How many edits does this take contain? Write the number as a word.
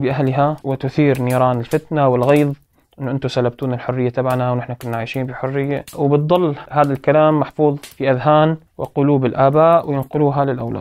zero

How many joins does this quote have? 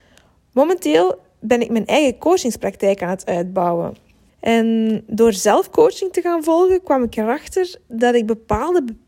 one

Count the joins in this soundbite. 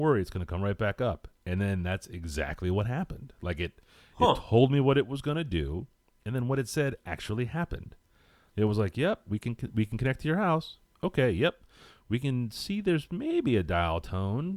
one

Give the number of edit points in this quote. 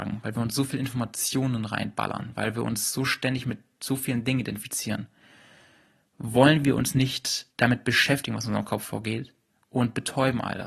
one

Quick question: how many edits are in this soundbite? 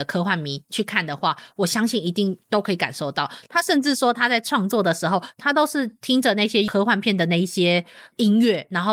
zero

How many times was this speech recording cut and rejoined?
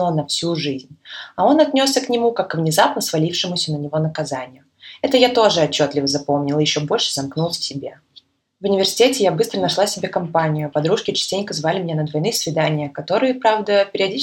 zero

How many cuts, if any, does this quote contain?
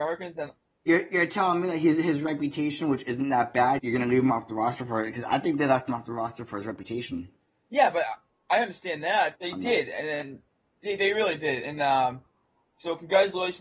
two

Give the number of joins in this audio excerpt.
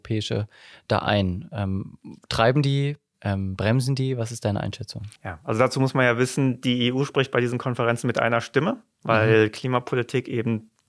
one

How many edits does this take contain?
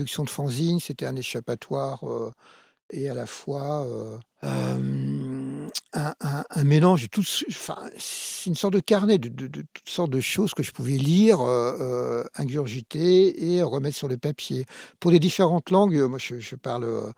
one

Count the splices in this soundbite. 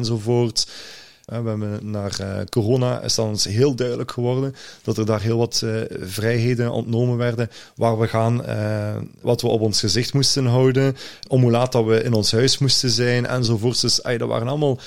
three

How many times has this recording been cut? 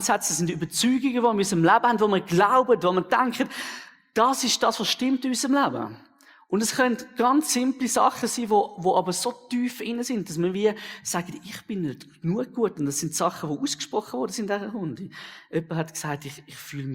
zero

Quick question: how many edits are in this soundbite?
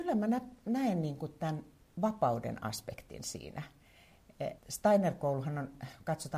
one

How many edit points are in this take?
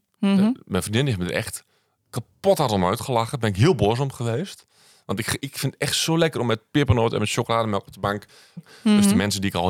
two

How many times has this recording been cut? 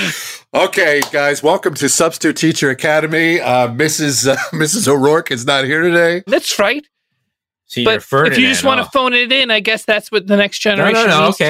one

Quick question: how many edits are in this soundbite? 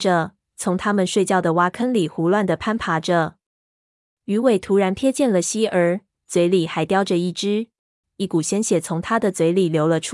two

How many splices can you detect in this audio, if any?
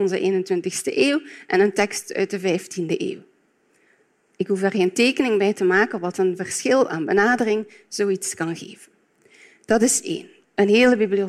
zero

